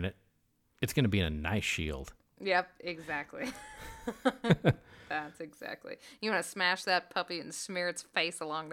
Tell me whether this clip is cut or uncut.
uncut